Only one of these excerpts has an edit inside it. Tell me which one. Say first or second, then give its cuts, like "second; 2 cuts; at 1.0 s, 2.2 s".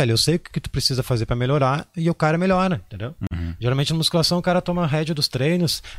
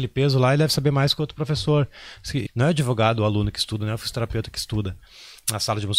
second; 2 cuts; at 2.5 s, 3.8 s